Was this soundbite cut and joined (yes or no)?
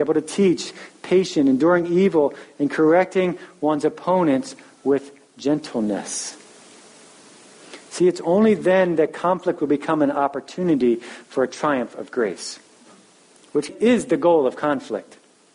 yes